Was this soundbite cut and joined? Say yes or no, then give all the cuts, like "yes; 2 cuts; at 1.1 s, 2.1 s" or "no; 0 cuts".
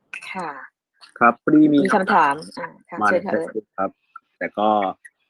no; 0 cuts